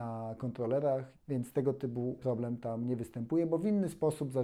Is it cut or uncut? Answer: cut